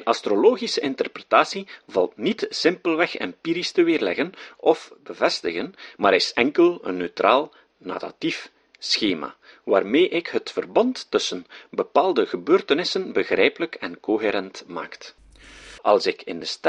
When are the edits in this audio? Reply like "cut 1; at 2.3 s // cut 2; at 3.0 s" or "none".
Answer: cut 1; at 15.8 s